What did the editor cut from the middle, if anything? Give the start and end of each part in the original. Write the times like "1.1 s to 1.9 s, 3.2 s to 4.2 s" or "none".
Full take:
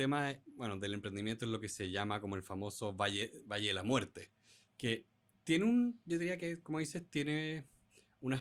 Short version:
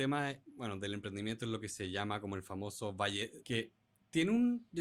3.4 s to 4.7 s